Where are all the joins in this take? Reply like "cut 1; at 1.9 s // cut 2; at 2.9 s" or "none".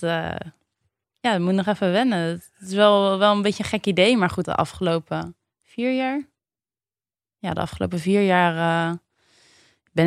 cut 1; at 4.4 s